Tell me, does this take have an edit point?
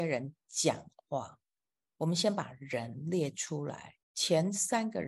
yes; 1 cut; at 4.0 s

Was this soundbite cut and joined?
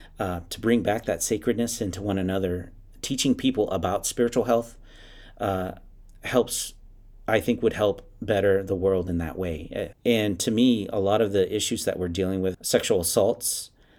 yes; 2 cuts; at 9.9 s, 12.5 s

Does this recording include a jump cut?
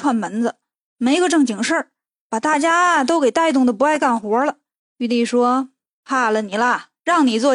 yes; 1 cut; at 4.8 s

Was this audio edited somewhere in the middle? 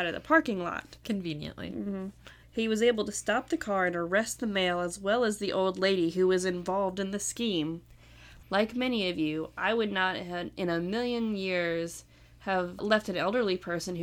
yes; 2 cuts; at 2.4 s, 8.4 s

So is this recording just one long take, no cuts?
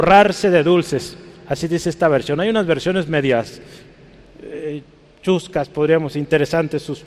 yes; 0 cuts

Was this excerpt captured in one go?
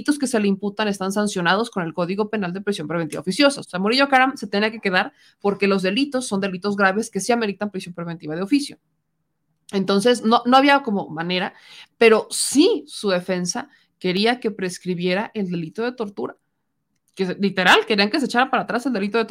no; 2 cuts; at 3.6 s, 17.0 s

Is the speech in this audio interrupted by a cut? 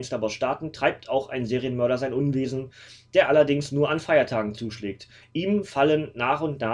no; 0 cuts

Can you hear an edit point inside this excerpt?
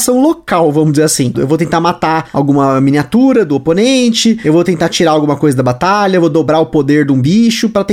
yes; 1 cut; at 1.3 s

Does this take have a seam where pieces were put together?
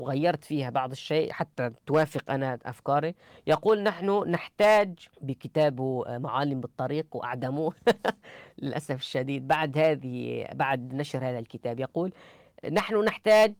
yes; 1 cut; at 5.1 s

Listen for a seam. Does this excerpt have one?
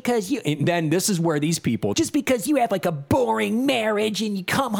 yes; 1 cut; at 1.9 s

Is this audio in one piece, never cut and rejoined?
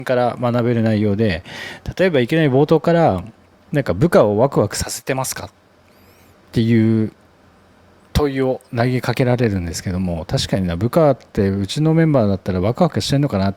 yes; 0 cuts

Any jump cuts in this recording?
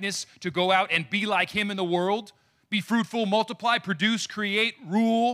no; 0 cuts

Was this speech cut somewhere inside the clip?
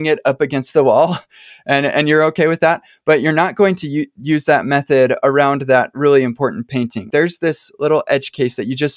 yes; 1 cut; at 7.1 s

